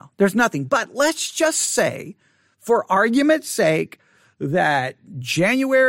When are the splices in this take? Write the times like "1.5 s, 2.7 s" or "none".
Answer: none